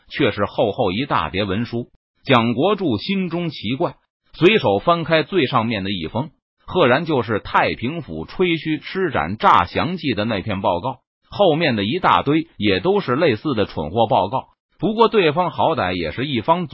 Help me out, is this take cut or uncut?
cut